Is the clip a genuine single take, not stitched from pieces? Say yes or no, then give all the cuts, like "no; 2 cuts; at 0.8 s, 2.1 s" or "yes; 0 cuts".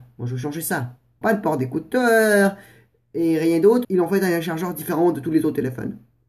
no; 2 cuts; at 1.2 s, 3.8 s